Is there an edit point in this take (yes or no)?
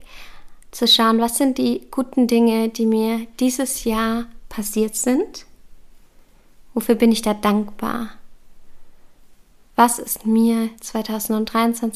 no